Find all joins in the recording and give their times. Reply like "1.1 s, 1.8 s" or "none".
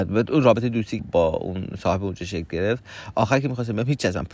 1.0 s